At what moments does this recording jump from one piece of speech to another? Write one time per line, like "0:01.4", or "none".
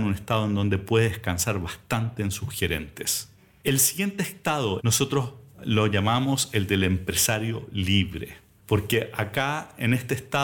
0:04.8
0:08.6